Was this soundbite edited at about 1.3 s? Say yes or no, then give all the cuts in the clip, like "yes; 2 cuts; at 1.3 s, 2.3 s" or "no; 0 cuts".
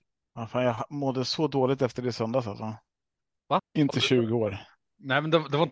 no; 1 cut; at 3.6 s